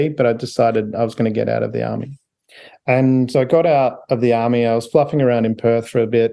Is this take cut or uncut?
cut